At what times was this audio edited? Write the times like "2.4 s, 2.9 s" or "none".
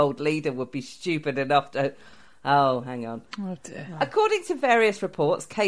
none